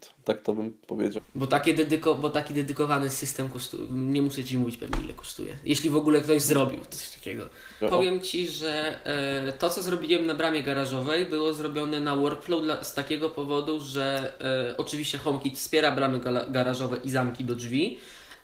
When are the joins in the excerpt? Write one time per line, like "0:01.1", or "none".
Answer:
0:01.2
0:07.8